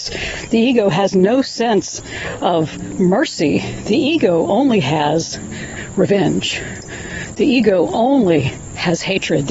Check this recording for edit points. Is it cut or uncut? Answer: uncut